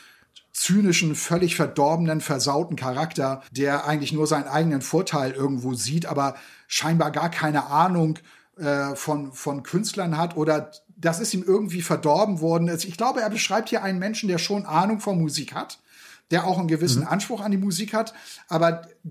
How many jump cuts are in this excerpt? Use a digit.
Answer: 1